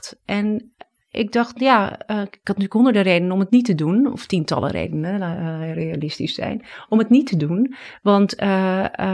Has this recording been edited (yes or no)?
no